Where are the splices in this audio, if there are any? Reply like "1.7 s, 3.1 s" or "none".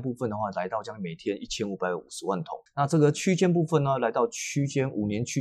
2.7 s